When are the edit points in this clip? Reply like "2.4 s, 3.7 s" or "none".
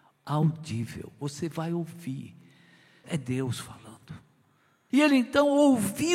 3.0 s, 4.9 s